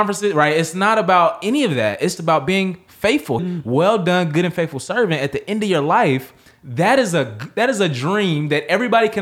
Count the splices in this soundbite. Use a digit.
2